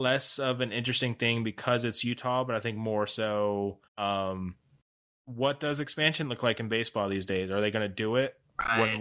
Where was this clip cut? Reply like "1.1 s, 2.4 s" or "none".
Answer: 3.9 s

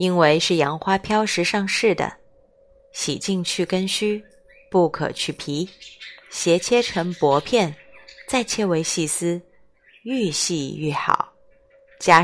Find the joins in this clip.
none

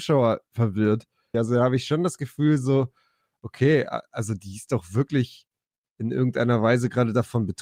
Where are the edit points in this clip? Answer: 1.3 s

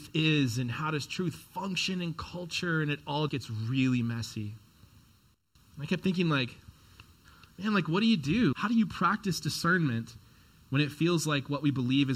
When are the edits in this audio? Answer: 3.3 s, 8.5 s

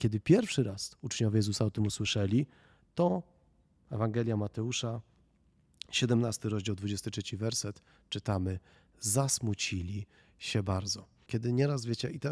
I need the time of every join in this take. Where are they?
11.3 s

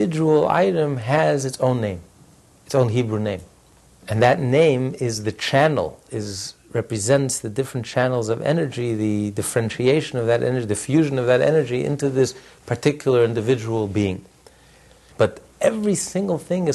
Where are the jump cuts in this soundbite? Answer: 15.1 s

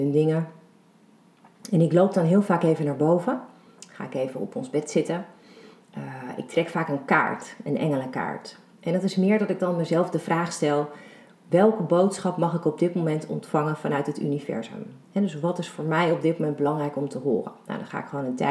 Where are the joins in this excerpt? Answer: none

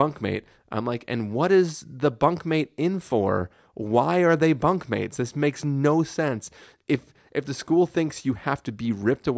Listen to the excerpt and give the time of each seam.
none

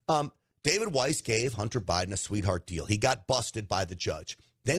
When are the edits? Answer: none

